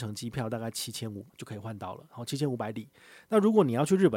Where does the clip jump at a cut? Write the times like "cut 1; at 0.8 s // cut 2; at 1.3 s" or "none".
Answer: cut 1; at 1.3 s